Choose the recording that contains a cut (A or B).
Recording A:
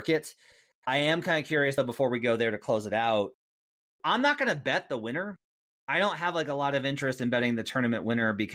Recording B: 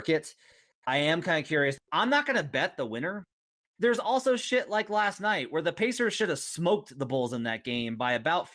B